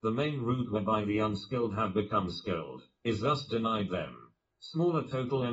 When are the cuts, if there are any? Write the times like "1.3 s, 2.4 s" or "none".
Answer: 4.5 s